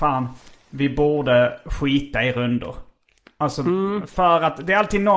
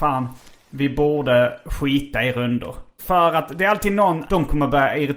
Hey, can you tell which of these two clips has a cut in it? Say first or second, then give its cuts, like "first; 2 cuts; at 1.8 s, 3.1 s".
second; 2 cuts; at 3.0 s, 4.3 s